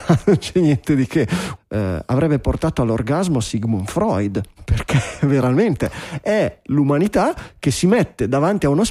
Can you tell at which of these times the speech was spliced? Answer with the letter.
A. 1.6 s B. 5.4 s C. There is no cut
A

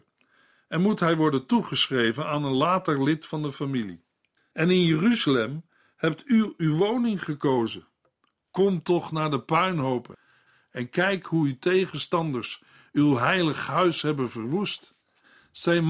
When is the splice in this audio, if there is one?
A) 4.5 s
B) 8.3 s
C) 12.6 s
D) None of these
A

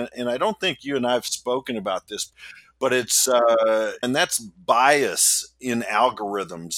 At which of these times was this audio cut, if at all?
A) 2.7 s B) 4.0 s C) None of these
B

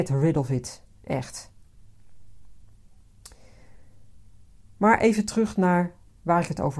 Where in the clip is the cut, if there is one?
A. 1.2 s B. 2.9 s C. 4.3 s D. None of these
D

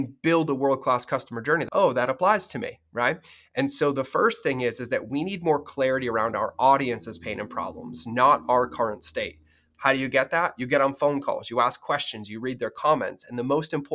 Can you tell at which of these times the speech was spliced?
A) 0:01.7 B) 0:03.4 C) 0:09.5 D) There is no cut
A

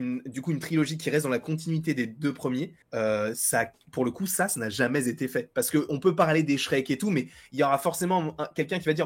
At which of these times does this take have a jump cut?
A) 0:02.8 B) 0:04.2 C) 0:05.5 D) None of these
A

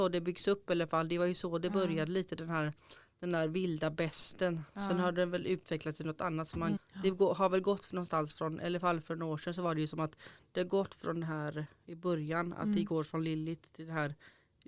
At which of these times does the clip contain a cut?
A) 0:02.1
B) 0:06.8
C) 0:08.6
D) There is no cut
B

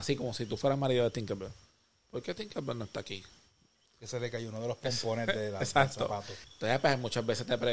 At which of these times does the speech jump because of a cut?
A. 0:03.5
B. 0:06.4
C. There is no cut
B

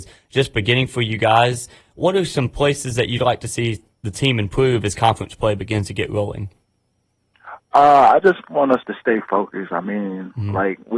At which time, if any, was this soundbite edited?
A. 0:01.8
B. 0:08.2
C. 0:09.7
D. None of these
D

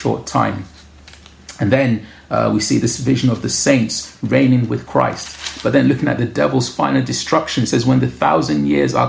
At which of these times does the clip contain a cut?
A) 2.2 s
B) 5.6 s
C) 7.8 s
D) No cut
D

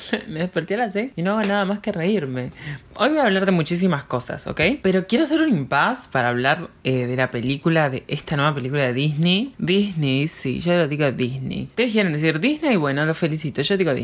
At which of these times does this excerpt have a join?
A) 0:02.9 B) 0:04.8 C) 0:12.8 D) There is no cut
A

